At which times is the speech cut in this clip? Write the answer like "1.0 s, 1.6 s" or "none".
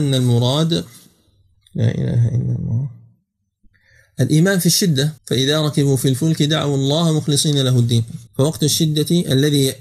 5.2 s, 8.3 s

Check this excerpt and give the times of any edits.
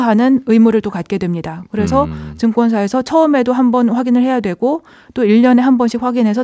none

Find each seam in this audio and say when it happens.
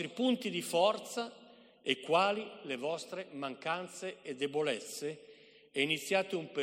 none

